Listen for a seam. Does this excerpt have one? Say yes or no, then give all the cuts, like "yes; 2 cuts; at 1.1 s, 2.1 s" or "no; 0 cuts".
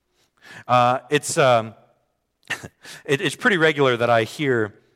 no; 0 cuts